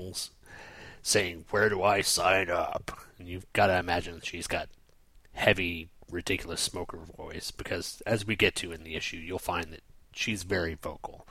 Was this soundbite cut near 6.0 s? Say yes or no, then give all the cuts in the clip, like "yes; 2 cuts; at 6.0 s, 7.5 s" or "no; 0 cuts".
no; 0 cuts